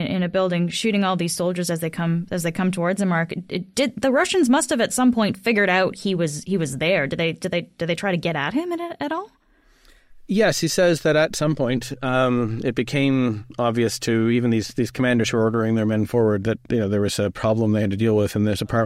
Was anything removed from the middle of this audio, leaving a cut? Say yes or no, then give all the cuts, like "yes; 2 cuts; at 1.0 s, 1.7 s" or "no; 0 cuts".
no; 0 cuts